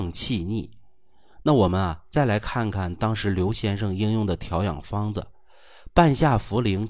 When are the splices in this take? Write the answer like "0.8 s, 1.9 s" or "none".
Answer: none